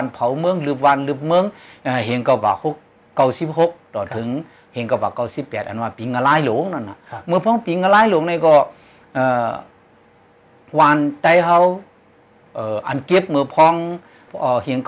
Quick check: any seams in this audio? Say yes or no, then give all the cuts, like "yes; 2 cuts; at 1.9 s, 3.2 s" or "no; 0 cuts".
no; 0 cuts